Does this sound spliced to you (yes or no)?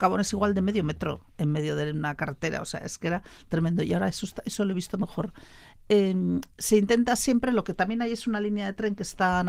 no